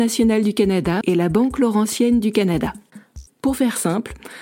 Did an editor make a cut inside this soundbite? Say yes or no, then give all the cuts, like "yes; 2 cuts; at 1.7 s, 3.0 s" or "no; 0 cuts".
yes; 2 cuts; at 1.0 s, 3.3 s